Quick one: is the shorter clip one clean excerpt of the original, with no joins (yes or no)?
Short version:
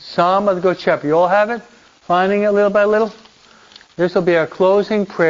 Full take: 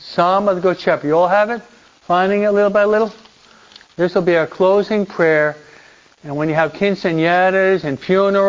yes